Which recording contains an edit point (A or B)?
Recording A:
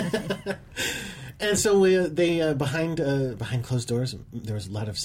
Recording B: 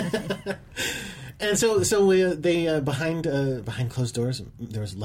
A